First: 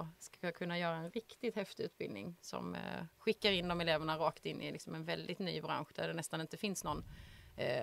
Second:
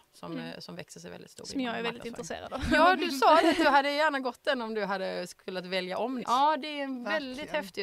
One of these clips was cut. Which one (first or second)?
second